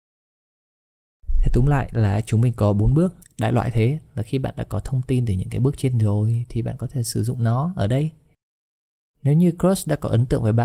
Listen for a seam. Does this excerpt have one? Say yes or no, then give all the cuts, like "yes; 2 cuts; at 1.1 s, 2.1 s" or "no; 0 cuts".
yes; 1 cut; at 3.2 s